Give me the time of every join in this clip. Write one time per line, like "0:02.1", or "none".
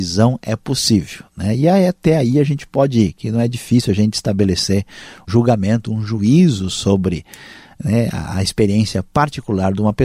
0:05.3